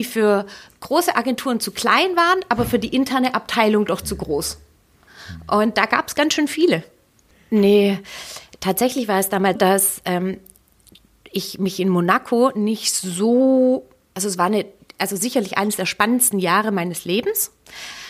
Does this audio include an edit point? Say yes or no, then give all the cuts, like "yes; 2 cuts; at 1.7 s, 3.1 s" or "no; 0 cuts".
yes; 2 cuts; at 7.3 s, 9.6 s